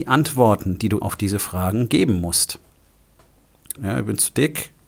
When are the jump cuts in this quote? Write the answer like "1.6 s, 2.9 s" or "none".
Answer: 1.0 s, 3.8 s